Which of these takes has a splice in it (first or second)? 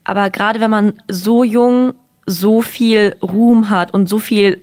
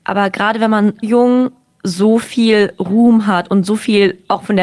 second